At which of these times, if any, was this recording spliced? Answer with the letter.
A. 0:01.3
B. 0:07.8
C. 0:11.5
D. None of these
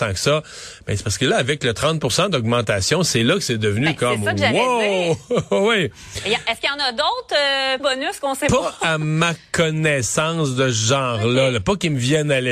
B